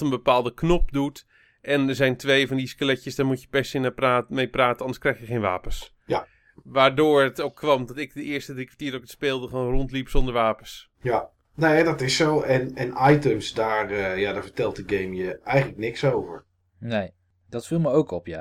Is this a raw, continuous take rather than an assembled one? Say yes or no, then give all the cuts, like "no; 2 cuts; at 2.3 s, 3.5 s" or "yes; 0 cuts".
yes; 0 cuts